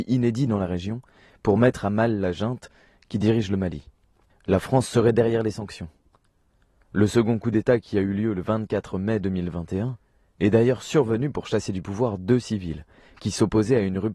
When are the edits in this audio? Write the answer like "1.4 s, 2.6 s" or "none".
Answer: 4.3 s